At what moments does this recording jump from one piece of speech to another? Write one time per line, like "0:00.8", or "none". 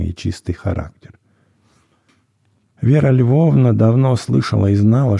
0:02.7